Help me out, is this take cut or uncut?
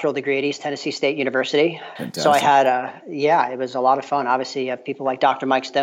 cut